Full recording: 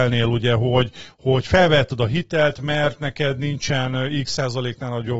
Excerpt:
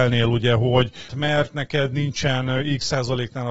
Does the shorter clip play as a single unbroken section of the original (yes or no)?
no